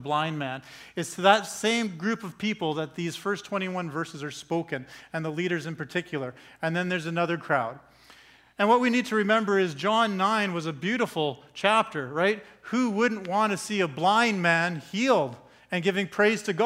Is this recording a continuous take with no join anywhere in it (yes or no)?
yes